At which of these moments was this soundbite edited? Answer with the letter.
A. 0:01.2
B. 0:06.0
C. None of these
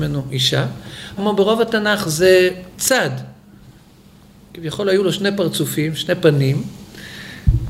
A